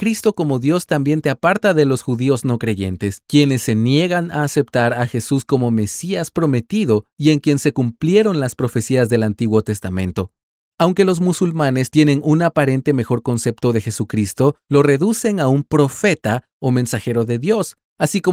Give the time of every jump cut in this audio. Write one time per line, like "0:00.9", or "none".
none